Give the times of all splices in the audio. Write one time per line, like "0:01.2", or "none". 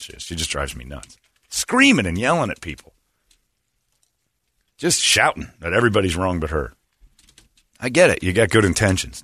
none